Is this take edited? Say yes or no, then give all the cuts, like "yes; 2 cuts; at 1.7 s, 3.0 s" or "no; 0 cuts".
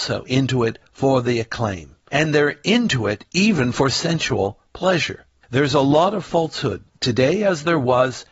no; 0 cuts